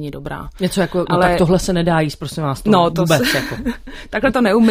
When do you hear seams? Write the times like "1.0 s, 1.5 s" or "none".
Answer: 2.9 s